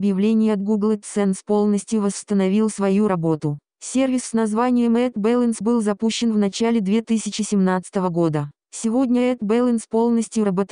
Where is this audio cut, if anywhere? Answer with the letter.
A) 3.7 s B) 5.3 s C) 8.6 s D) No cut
C